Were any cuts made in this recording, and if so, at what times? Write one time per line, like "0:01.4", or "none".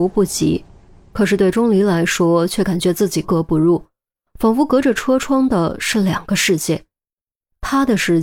0:03.2